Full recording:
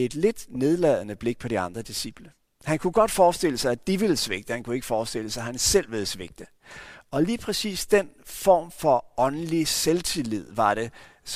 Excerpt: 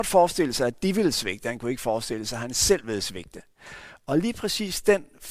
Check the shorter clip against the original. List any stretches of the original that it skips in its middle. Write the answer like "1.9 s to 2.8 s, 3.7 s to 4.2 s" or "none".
none